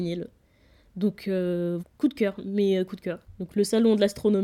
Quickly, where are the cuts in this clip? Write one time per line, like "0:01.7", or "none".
0:01.8

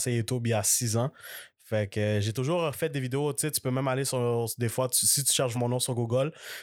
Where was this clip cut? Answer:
0:05.5

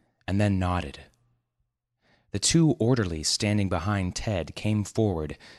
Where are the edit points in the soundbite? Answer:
none

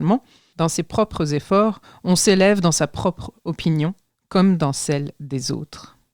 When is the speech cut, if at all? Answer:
none

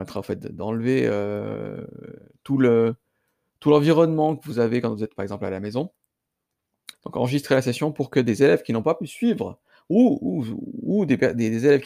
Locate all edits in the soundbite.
0:06.9

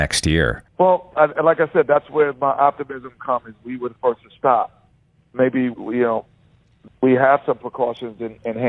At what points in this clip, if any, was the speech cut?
0:01.1
0:05.7

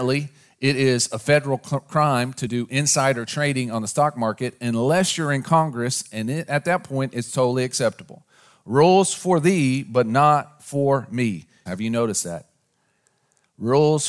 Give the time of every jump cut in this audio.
0:06.5
0:11.7

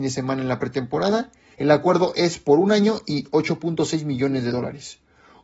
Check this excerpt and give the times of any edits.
0:01.5

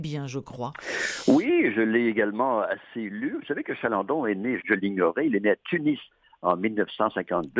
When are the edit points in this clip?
0:04.6

